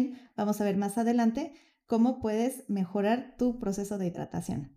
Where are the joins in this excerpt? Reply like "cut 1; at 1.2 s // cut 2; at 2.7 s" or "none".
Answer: none